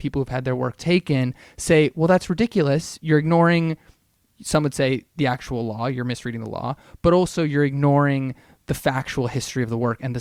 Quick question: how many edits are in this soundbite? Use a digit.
0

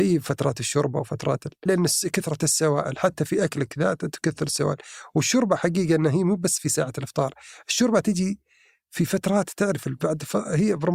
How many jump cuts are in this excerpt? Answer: 1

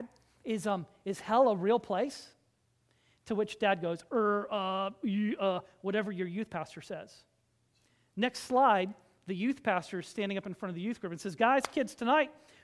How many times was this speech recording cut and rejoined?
0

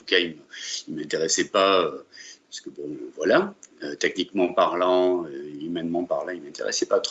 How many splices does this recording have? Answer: 0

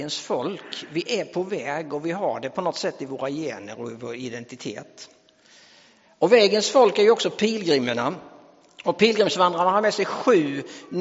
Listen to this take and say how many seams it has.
0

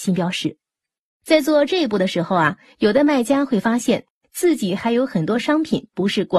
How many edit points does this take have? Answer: 1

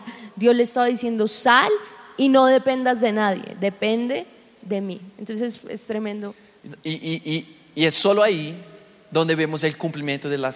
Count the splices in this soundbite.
0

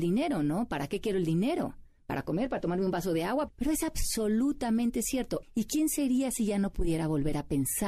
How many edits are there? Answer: 2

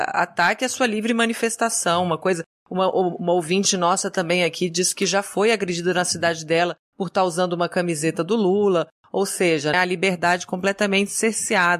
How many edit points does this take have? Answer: 1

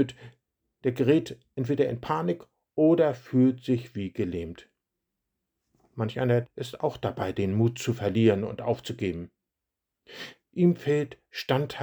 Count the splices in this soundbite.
2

